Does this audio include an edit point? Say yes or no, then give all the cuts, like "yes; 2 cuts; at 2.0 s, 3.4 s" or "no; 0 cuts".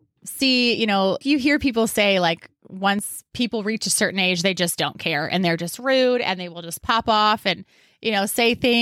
yes; 1 cut; at 1.2 s